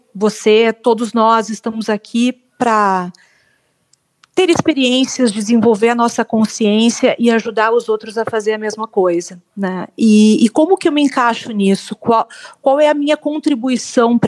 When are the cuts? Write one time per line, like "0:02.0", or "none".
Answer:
none